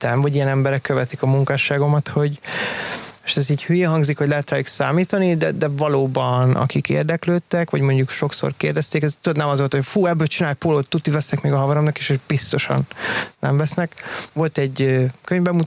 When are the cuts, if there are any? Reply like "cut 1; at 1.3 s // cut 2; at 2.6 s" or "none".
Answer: cut 1; at 14.3 s